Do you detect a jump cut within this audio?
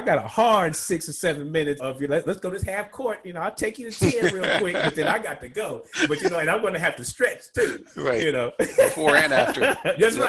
yes; 1 cut; at 1.8 s

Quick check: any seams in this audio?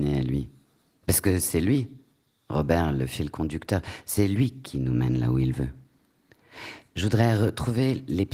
no; 0 cuts

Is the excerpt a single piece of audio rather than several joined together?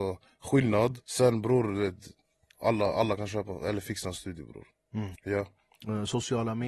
no; 2 cuts; at 1.0 s, 5.2 s

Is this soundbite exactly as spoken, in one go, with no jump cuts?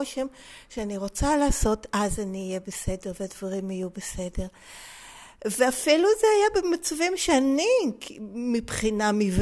yes; 0 cuts

